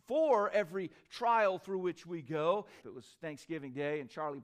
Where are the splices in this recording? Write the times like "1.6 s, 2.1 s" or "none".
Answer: 2.8 s